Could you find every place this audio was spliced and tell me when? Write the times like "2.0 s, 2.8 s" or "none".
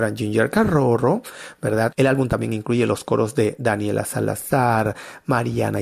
1.9 s